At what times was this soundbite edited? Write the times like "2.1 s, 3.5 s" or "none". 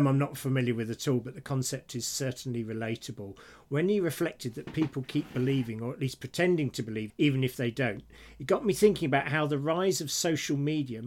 7.1 s

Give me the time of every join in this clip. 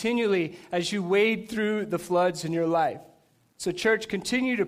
none

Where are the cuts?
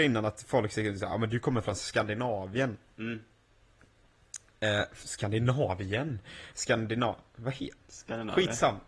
6.5 s, 7.8 s

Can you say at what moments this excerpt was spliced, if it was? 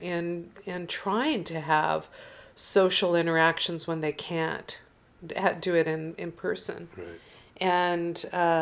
none

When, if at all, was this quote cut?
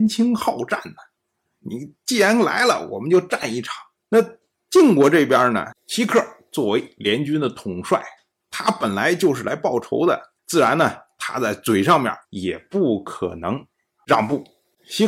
4.0 s, 10.4 s, 12.2 s

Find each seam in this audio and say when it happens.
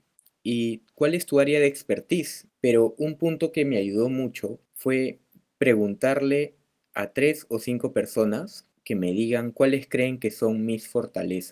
2.5 s, 4.7 s, 8.7 s

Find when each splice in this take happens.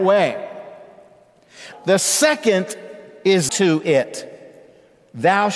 1.7 s, 3.5 s

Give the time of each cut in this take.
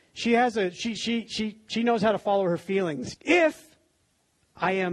0.9 s, 3.1 s

